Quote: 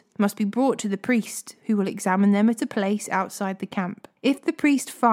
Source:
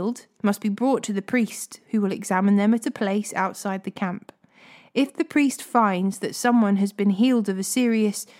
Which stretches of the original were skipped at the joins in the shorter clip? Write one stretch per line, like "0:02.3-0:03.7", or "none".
0:04.4-0:04.9